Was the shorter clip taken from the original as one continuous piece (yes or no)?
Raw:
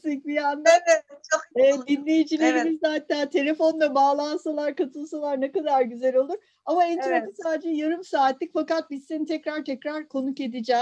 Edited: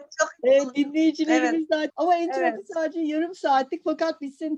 no